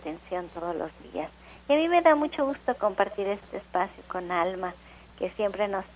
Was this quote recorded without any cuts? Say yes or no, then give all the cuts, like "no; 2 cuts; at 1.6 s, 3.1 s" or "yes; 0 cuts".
yes; 0 cuts